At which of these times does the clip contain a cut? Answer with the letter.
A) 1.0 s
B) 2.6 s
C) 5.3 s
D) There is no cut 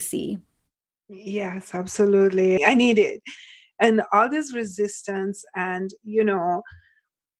B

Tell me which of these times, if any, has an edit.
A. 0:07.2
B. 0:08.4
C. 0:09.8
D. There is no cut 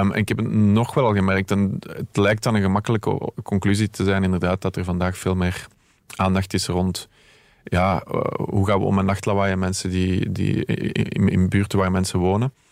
D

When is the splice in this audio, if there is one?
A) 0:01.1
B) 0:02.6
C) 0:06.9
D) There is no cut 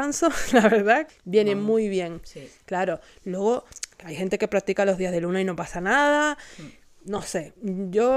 A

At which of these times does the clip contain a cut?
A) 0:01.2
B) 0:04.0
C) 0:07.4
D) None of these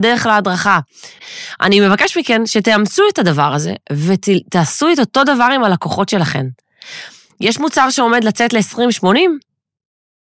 A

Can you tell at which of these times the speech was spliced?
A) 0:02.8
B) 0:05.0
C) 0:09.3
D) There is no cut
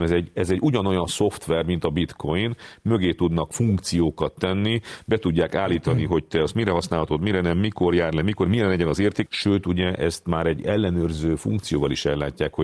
C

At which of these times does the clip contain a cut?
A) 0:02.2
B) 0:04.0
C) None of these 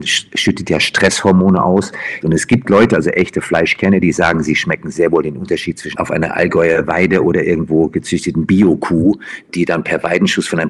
A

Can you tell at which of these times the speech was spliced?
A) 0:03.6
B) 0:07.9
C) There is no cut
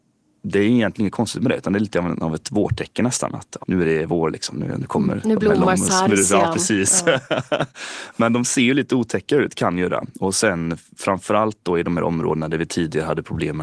A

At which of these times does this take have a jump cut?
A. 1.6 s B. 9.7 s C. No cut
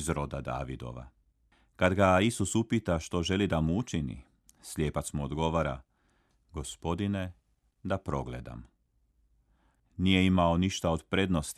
B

